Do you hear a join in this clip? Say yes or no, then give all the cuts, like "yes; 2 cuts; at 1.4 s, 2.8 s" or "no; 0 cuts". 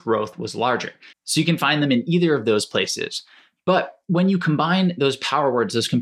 yes; 1 cut; at 1.1 s